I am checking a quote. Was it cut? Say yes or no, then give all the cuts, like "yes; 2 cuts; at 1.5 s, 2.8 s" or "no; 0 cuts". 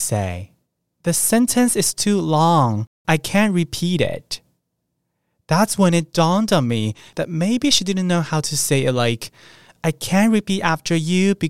no; 0 cuts